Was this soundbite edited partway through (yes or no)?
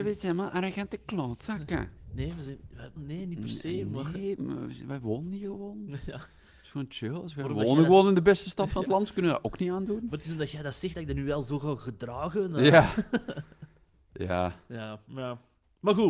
yes